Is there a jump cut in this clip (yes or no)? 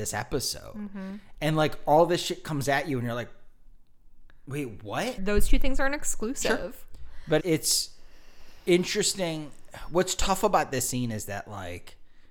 yes